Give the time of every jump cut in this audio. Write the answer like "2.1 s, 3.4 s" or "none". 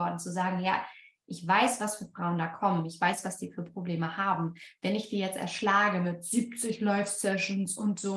none